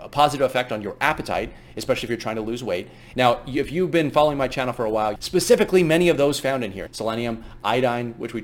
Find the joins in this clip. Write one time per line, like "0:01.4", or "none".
0:03.1
0:05.2
0:06.9